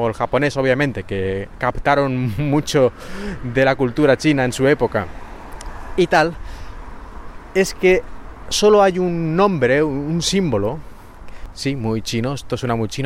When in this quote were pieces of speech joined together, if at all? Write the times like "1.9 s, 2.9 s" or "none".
11.5 s